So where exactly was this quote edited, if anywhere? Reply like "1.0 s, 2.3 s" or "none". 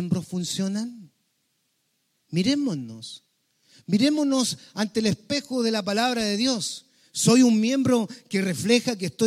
2.2 s

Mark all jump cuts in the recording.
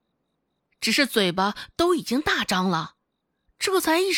none

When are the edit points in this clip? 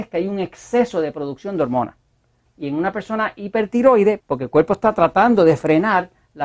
2.5 s, 4.2 s

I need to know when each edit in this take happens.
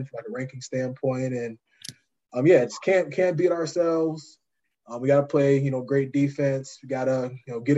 none

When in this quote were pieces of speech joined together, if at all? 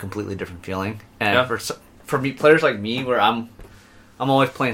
none

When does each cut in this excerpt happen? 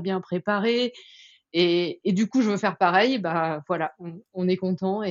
none

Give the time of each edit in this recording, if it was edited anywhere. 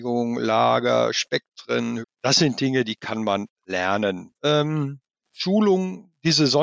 2.0 s, 4.4 s

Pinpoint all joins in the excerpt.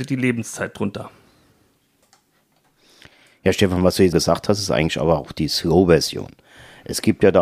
4.1 s

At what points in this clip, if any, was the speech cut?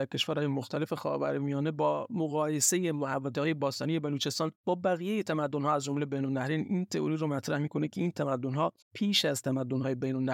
4.6 s, 8.8 s

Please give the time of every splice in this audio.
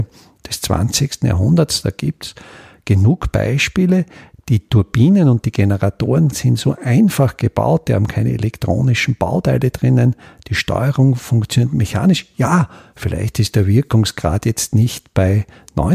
none

